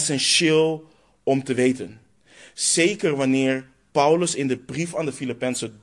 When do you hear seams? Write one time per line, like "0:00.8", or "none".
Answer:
none